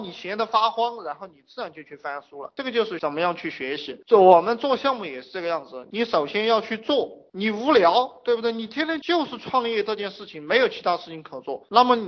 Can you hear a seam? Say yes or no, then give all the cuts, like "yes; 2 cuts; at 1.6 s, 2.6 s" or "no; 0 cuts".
no; 0 cuts